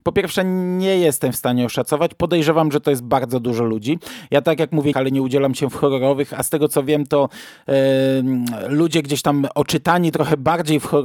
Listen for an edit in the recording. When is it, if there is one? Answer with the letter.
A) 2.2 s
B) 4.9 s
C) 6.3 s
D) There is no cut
B